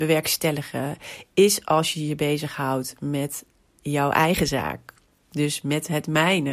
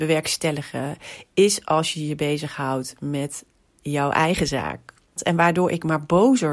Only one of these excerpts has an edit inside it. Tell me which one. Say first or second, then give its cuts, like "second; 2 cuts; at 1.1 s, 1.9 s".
second; 1 cut; at 5.2 s